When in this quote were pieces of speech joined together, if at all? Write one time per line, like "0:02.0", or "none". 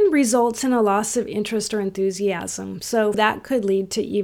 0:03.1